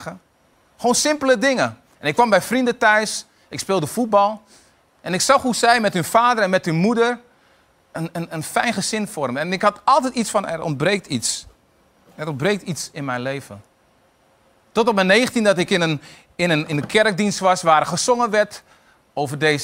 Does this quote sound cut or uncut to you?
uncut